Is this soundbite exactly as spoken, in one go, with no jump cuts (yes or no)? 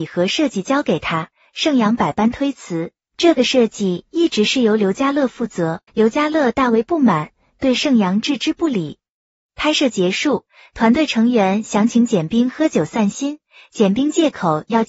no